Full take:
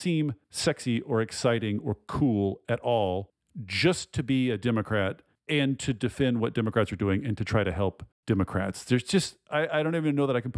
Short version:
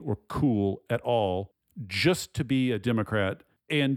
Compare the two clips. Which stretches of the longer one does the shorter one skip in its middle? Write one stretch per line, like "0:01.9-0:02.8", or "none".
none